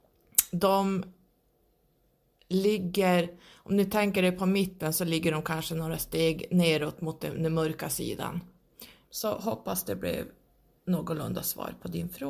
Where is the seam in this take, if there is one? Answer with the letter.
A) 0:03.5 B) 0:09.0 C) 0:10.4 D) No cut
B